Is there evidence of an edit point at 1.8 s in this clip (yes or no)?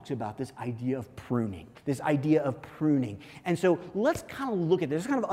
yes